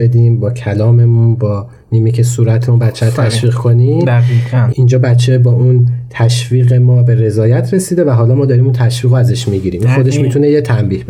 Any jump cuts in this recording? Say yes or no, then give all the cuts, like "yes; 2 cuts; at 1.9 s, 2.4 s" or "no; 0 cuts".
no; 0 cuts